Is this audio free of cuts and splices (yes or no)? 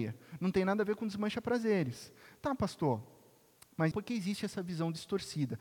no